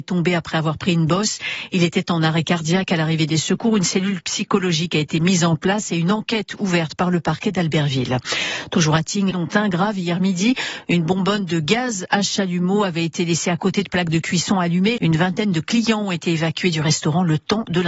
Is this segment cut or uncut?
cut